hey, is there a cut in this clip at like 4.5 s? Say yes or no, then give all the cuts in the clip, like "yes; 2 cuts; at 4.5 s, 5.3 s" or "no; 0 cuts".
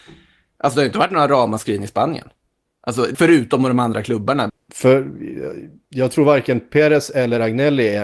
yes; 2 cuts; at 3.1 s, 4.5 s